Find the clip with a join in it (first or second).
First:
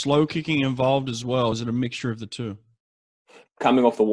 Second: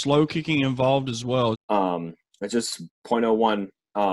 second